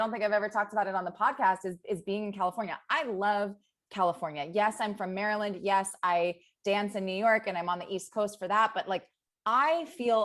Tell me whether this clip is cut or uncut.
uncut